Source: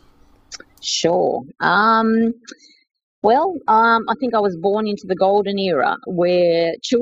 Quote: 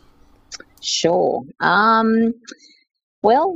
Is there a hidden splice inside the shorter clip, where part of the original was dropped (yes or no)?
no